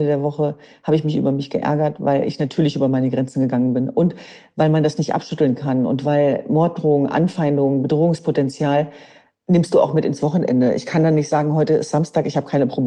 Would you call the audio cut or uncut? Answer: uncut